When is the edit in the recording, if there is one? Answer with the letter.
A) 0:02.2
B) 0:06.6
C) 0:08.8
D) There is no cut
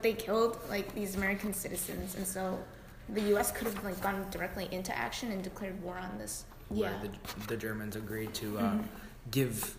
B